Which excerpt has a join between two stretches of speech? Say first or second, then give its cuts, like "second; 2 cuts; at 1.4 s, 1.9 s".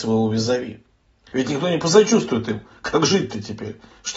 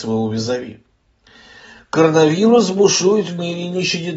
first; 1 cut; at 1.3 s